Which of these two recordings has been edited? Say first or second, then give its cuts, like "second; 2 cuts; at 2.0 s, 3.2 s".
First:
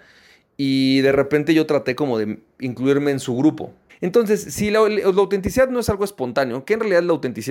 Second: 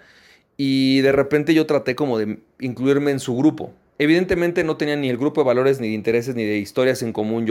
first; 1 cut; at 3.9 s